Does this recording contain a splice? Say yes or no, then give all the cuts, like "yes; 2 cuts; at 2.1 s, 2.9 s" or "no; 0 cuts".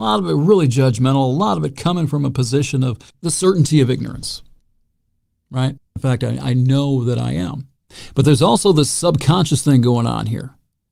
yes; 2 cuts; at 3.1 s, 6.0 s